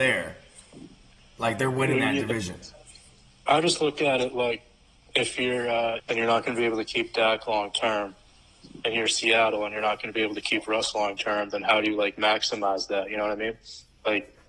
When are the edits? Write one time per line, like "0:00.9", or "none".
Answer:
0:06.0